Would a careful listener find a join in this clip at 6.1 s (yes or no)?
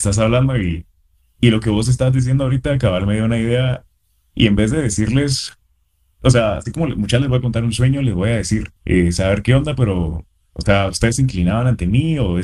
no